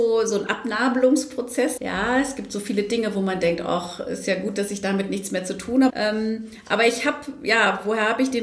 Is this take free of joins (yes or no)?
no